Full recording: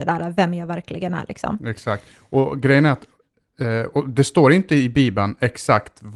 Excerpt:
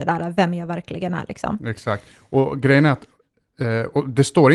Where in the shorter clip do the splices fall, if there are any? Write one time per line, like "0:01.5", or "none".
none